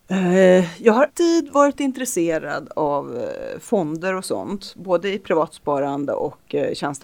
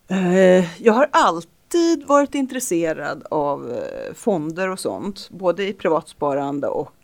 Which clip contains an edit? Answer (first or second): first